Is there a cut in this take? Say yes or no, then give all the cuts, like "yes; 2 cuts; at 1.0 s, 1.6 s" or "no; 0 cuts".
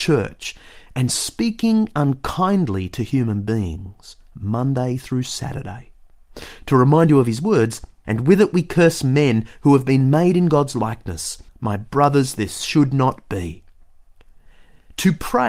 yes; 2 cuts; at 8.0 s, 11.5 s